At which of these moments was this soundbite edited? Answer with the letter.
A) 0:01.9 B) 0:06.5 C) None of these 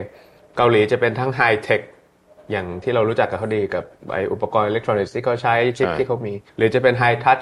B